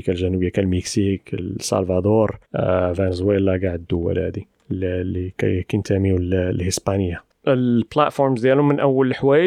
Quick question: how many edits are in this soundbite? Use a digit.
1